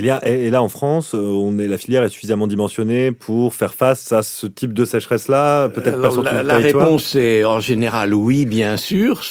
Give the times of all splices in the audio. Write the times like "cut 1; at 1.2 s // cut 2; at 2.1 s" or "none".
none